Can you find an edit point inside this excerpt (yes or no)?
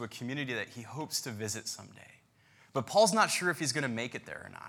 no